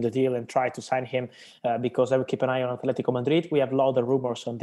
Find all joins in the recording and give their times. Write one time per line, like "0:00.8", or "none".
none